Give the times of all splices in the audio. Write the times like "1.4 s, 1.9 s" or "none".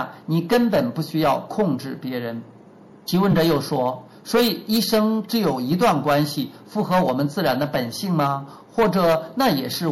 none